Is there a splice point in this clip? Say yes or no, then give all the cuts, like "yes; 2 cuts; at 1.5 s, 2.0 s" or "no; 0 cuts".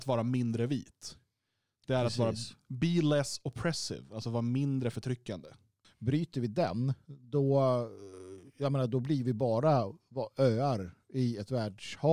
yes; 1 cut; at 5.8 s